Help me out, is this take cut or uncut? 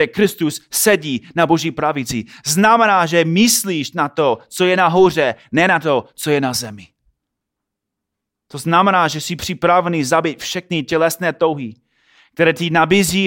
uncut